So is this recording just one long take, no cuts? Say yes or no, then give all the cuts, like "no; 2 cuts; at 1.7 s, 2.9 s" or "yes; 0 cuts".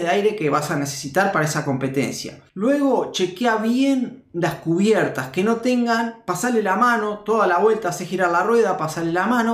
no; 1 cut; at 2.5 s